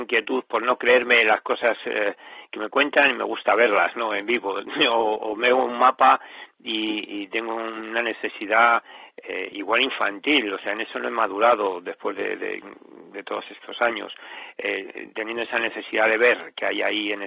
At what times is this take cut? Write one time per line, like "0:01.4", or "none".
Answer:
none